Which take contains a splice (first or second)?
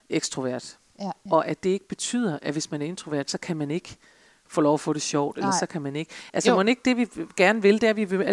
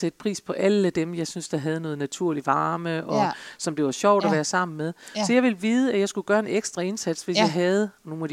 first